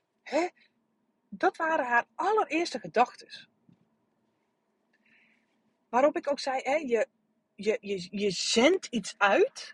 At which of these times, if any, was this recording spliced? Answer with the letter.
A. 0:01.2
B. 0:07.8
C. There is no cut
B